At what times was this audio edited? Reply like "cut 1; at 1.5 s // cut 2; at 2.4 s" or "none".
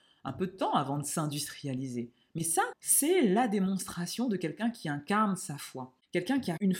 cut 1; at 2.7 s